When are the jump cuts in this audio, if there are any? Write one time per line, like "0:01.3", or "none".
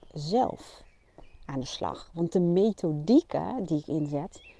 none